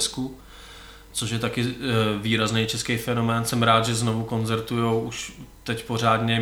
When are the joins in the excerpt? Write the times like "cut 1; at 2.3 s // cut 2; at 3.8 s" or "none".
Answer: none